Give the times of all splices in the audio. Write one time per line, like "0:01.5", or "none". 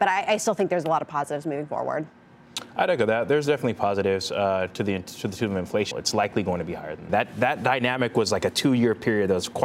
0:05.9
0:07.1